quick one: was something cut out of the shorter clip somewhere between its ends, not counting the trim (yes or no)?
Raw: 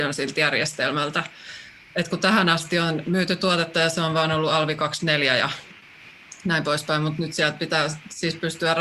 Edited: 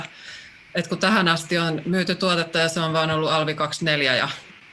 no